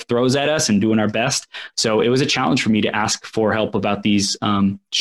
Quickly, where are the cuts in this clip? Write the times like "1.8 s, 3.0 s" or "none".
1.7 s